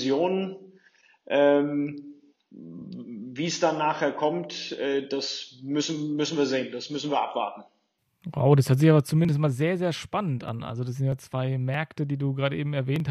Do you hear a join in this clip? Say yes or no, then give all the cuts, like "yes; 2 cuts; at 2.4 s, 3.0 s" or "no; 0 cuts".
no; 0 cuts